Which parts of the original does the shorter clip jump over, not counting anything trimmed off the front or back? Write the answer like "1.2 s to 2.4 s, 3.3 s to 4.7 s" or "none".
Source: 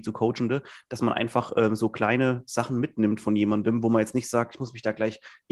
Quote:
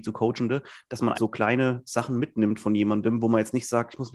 1.1 s to 1.8 s